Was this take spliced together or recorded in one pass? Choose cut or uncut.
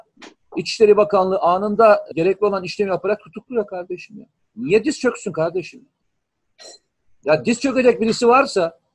cut